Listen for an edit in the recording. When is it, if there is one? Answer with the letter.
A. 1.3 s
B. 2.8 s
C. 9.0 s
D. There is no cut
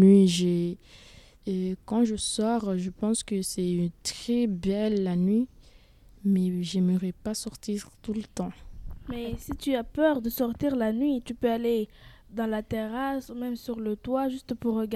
A